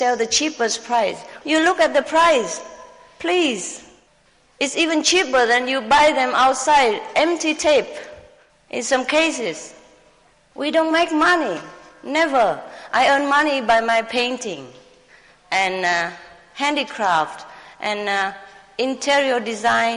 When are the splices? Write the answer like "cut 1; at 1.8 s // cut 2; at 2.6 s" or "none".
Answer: cut 1; at 1.4 s